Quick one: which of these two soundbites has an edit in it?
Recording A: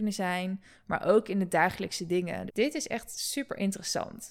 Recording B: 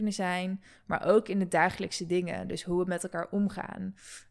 A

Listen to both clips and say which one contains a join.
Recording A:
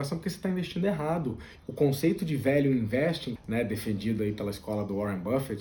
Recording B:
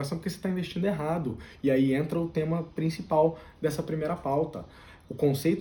A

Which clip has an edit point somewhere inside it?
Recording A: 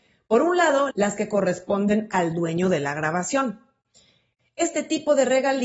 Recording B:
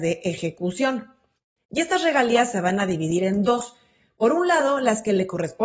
A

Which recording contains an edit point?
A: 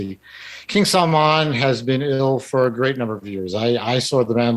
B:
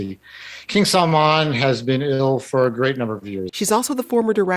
B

